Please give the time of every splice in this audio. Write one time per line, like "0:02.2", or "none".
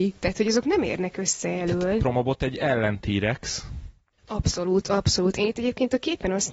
0:04.2